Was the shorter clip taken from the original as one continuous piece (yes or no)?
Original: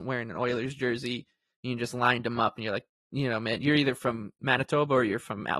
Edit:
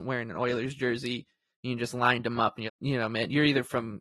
no